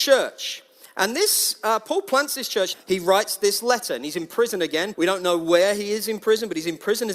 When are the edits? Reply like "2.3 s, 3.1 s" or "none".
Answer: 2.7 s, 4.9 s